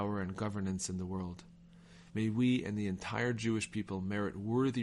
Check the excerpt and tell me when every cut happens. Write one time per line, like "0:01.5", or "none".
0:02.1